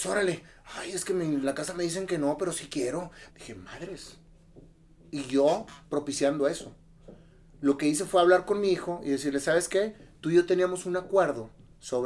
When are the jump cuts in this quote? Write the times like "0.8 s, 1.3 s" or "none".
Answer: 3.3 s